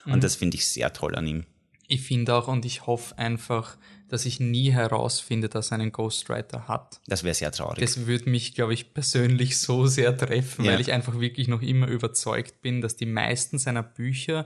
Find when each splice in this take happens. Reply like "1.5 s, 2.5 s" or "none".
none